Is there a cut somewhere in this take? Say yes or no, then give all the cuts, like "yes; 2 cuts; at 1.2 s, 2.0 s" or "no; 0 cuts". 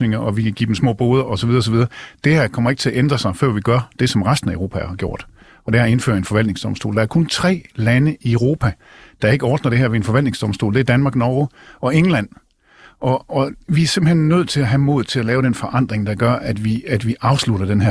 no; 0 cuts